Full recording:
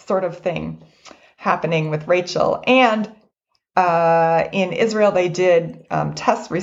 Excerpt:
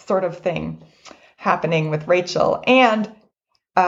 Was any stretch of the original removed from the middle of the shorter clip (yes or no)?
no